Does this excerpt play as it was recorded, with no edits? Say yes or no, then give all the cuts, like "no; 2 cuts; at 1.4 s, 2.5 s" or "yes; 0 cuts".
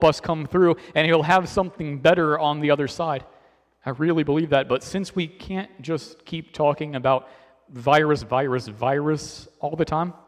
yes; 0 cuts